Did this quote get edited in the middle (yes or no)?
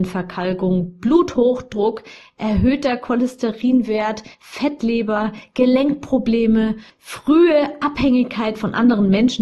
no